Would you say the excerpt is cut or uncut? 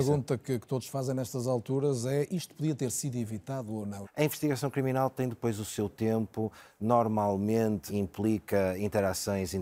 cut